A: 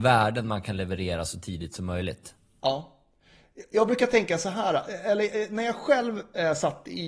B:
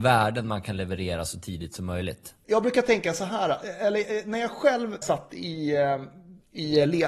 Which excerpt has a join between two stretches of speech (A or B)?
B